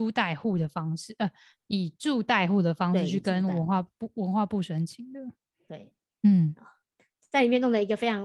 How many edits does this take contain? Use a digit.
0